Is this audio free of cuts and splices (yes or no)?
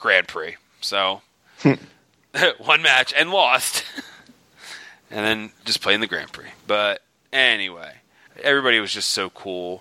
no